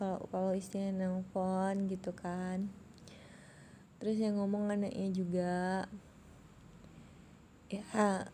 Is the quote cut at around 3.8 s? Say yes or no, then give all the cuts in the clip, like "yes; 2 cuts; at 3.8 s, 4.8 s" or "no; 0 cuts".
yes; 1 cut; at 3.8 s